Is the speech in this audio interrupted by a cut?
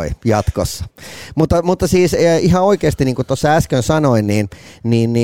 no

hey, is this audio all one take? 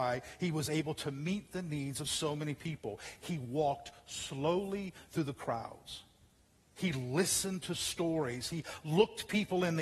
yes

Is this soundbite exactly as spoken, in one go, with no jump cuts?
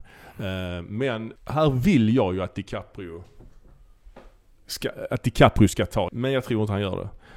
no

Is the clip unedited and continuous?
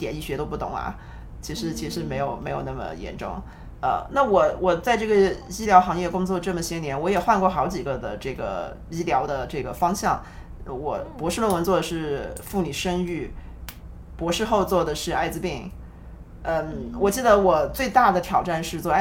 yes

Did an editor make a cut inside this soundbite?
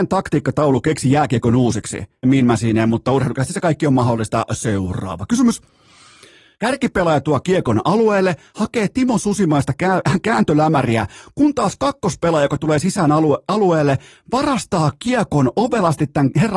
yes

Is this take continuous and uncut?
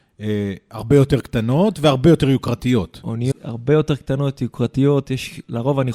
no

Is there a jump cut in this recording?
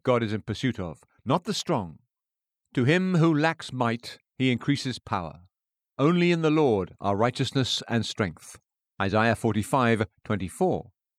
yes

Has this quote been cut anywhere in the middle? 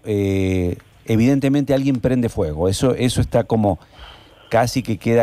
no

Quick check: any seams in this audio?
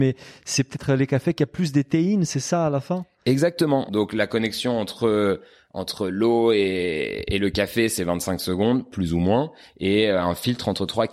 yes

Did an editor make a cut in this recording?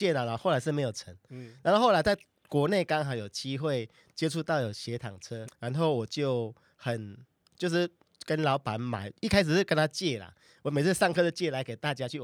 yes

